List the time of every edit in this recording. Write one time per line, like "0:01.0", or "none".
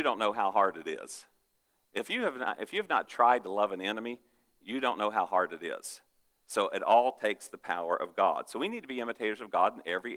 none